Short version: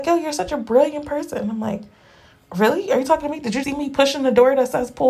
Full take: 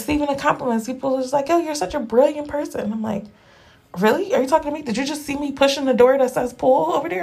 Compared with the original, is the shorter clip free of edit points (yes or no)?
no